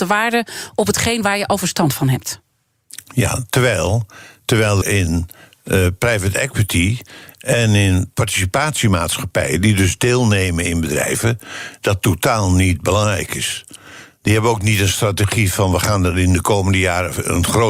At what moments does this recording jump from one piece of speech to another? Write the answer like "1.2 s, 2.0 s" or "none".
4.8 s